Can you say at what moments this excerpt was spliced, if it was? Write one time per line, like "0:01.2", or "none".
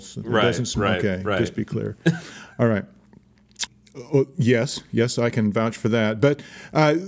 0:03.7